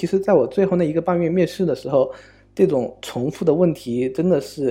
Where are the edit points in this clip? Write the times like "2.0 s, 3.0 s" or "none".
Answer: none

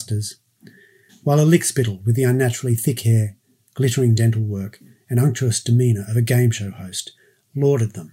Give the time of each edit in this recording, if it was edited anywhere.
none

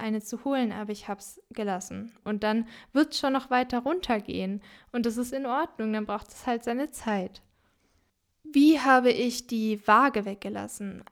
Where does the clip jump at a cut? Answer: 2.2 s

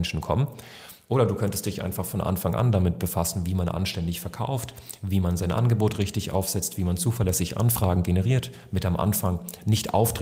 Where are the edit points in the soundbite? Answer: none

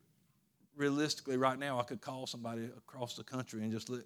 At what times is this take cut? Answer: none

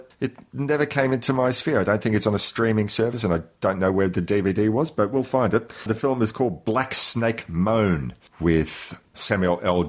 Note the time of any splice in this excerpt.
none

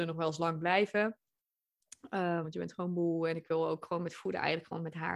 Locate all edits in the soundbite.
2.4 s

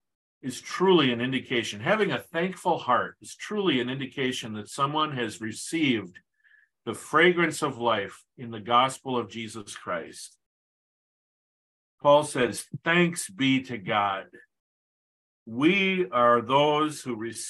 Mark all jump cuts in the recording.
none

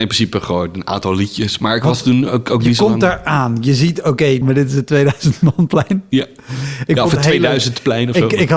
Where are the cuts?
4.4 s

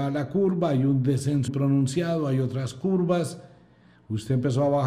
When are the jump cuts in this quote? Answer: 1.5 s

